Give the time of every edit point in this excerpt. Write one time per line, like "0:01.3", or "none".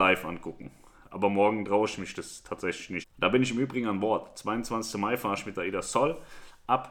0:03.0